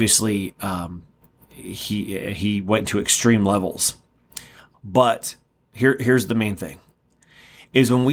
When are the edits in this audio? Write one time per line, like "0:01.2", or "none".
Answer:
0:04.7

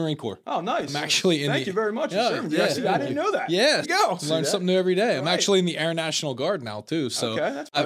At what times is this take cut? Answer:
0:03.8

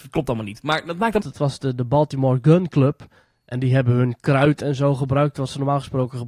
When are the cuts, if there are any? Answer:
0:01.2

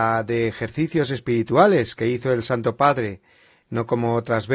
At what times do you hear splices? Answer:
0:03.6

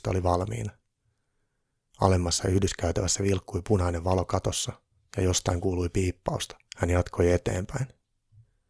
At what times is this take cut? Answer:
0:06.7

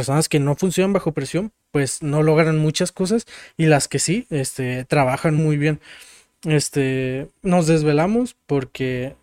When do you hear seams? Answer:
0:05.4
0:07.4

